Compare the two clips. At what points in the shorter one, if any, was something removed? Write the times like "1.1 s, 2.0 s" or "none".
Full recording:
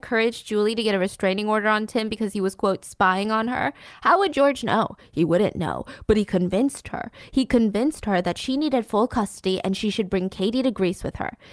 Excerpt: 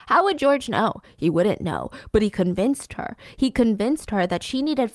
none